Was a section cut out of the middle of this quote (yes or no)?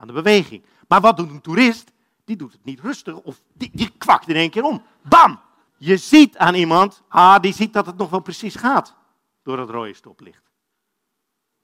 no